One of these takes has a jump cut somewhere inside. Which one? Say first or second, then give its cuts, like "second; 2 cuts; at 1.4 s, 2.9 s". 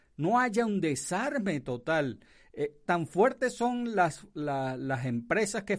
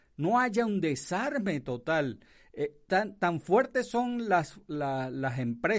first; 1 cut; at 2.9 s